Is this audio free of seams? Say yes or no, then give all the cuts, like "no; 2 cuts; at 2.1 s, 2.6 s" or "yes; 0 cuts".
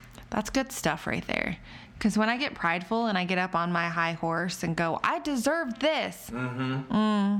yes; 0 cuts